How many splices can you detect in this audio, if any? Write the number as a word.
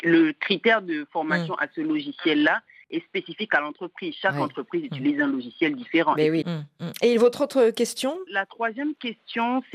two